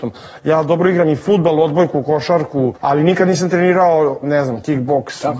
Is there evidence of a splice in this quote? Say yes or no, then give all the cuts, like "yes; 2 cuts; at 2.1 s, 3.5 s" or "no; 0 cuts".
yes; 2 cuts; at 2.8 s, 4.2 s